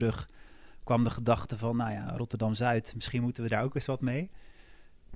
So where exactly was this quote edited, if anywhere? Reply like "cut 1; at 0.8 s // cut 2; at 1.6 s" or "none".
none